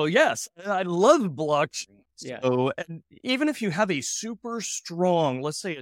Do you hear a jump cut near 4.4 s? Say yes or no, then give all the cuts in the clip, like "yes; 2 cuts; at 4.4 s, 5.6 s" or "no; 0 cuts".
no; 1 cut; at 2.0 s